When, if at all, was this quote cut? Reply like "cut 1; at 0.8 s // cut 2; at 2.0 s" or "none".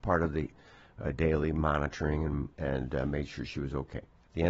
cut 1; at 2.5 s